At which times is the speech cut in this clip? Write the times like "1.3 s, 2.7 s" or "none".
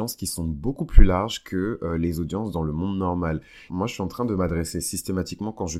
3.7 s